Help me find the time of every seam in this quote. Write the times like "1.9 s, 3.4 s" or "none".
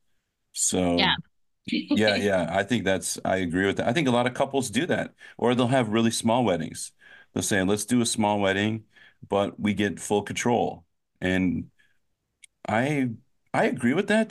1.7 s